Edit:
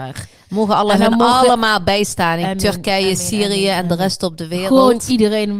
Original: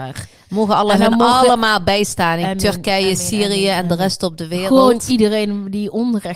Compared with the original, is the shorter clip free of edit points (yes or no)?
yes